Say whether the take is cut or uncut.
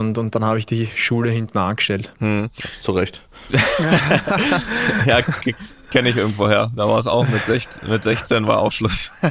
uncut